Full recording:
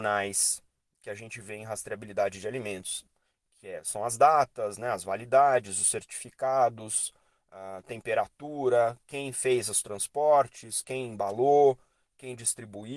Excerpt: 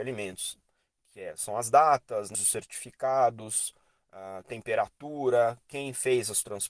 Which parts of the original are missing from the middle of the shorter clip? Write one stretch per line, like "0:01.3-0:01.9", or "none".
0:04.8-0:05.7